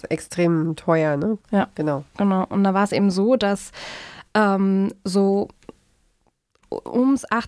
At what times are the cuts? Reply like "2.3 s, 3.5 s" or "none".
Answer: 1.4 s

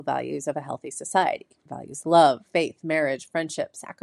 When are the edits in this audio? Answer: 2.0 s

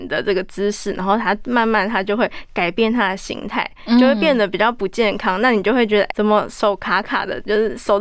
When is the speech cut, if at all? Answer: 6.1 s

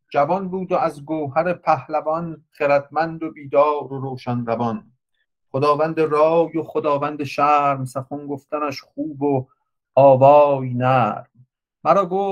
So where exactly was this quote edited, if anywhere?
none

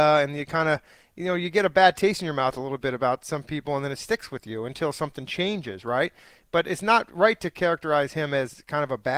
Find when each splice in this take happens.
none

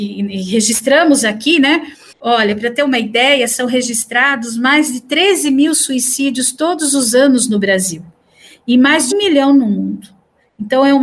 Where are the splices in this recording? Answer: 2.1 s, 9.1 s

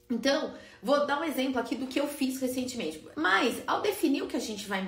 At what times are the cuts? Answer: 3.1 s

